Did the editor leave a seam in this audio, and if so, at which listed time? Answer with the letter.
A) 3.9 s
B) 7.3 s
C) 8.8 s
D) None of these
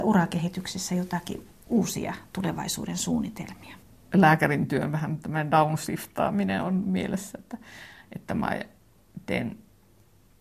D